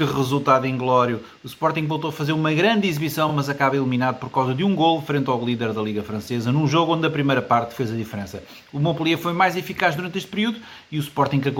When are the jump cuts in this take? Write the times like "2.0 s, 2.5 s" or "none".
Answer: none